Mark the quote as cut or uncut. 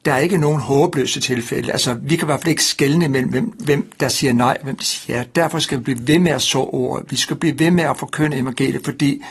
uncut